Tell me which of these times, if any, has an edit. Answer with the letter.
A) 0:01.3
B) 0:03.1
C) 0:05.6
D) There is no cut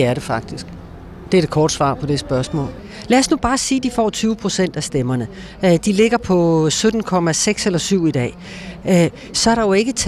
D